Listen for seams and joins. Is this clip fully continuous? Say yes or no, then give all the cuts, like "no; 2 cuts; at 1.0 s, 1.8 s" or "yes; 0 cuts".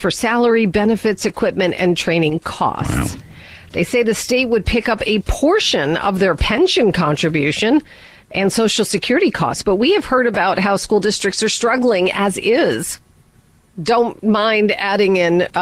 yes; 0 cuts